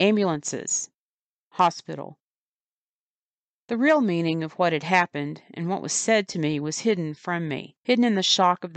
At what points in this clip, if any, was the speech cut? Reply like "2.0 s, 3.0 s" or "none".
7.8 s